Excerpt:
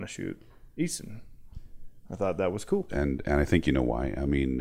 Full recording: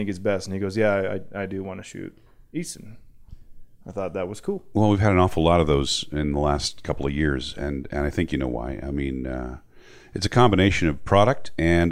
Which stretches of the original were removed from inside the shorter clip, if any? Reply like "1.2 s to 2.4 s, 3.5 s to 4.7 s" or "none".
4.6 s to 7.5 s